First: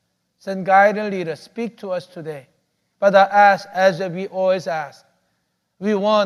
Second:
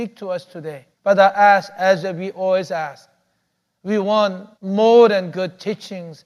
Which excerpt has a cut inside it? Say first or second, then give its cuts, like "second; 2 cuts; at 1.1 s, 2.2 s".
second; 2 cuts; at 0.9 s, 4.5 s